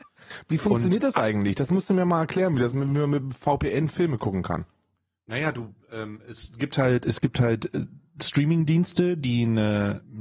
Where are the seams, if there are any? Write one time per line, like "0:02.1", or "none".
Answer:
none